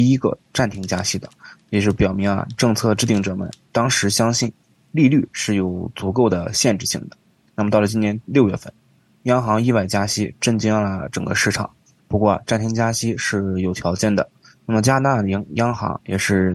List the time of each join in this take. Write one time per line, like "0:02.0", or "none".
0:12.0